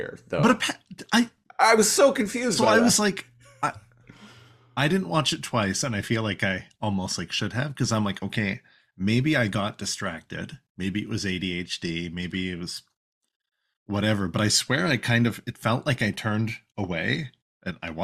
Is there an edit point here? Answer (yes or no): no